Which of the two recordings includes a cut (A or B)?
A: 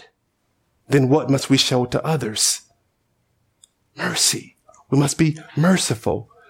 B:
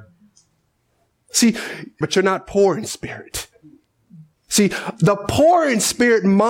B